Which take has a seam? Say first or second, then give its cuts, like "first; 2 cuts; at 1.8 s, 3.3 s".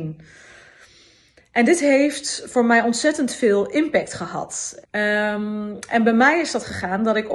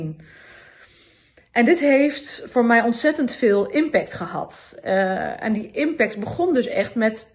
first; 1 cut; at 4.8 s